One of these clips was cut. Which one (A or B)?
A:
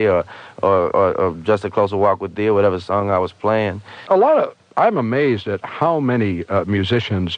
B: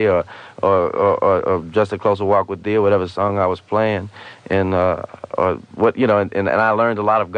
A